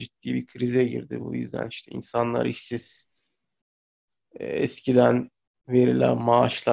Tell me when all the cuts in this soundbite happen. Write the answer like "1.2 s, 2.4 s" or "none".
none